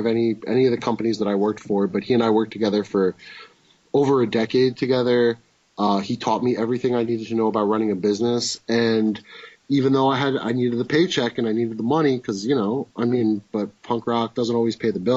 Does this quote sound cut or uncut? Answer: cut